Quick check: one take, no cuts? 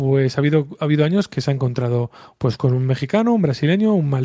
yes; 0 cuts

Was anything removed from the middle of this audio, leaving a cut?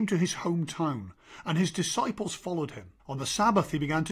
yes; 1 cut; at 3.0 s

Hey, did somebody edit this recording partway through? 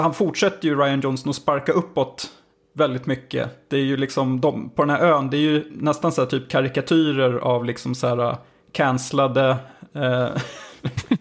no; 0 cuts

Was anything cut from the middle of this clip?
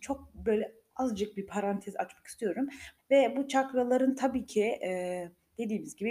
yes; 1 cut; at 3.0 s

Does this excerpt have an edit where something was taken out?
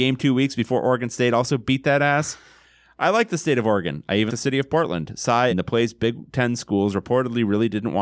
yes; 2 cuts; at 4.3 s, 5.5 s

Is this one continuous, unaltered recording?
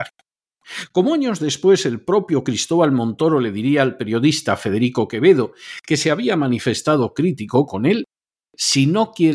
yes; 0 cuts

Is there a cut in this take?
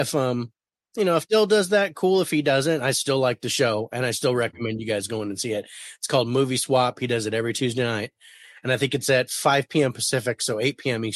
no; 0 cuts

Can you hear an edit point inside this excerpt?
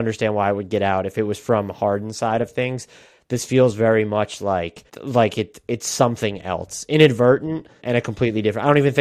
yes; 2 cuts; at 4.9 s, 7.8 s

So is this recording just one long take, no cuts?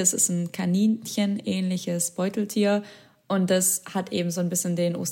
yes; 0 cuts

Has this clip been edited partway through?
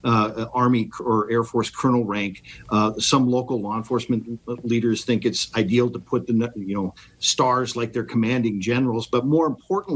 no; 0 cuts

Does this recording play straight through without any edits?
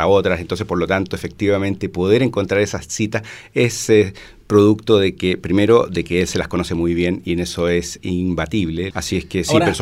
no; 1 cut; at 8.9 s

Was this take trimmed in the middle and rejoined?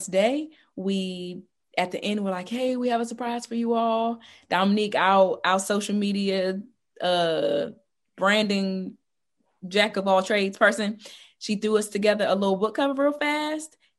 no; 0 cuts

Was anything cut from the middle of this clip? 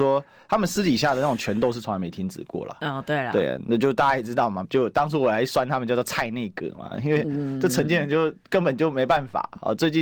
yes; 1 cut; at 4.6 s

